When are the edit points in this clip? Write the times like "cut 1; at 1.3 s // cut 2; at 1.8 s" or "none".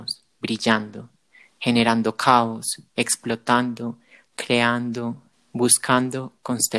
cut 1; at 5.3 s